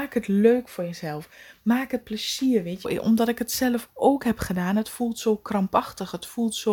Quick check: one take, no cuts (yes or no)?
no